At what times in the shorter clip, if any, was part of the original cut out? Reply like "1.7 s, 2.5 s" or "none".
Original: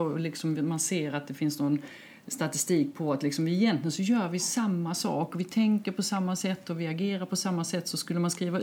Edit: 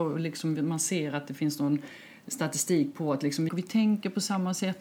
3.5 s